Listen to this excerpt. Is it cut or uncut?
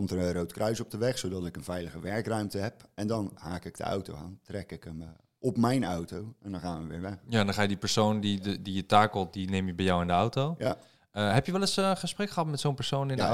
uncut